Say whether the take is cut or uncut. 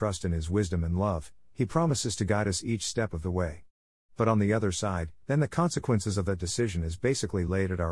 cut